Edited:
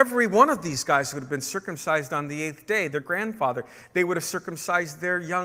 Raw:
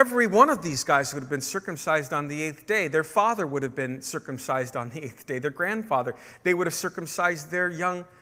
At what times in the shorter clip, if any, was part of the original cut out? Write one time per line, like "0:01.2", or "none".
0:02.9